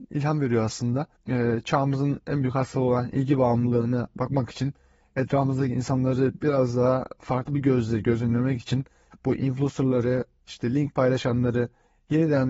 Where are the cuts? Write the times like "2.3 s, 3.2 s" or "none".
1.2 s